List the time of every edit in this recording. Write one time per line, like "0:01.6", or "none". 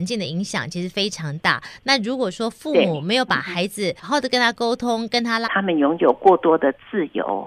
0:04.0
0:05.4

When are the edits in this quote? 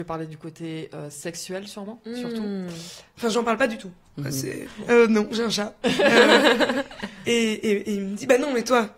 0:03.1
0:04.7

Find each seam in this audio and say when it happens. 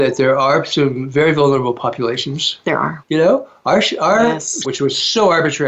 0:03.0
0:04.6

